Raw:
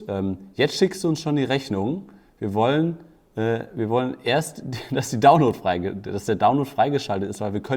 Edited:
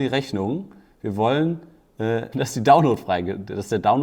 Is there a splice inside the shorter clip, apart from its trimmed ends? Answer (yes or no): yes